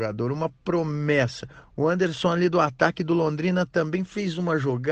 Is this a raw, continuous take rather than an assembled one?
yes; 0 cuts

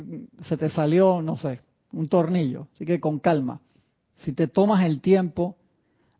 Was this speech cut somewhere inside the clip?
yes; 1 cut; at 4.1 s

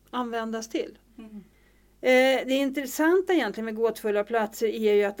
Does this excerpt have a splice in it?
yes; 1 cut; at 1.1 s

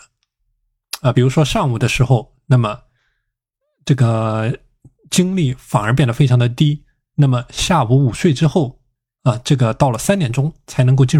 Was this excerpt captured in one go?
yes; 0 cuts

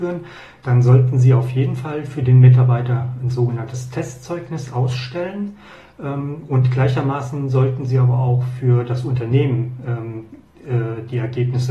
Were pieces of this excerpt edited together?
no; 0 cuts

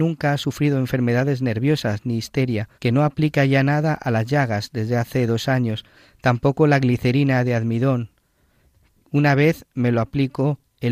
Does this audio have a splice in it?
yes; 1 cut; at 2.8 s

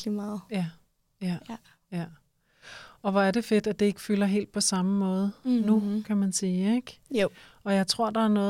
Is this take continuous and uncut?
yes; 0 cuts

